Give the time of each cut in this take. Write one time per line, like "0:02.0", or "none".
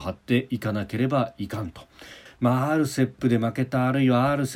0:02.3